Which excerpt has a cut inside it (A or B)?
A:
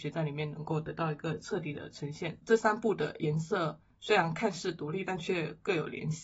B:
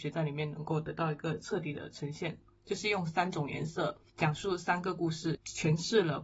B